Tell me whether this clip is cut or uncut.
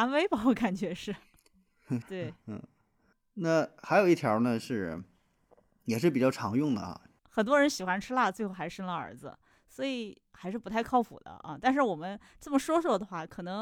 cut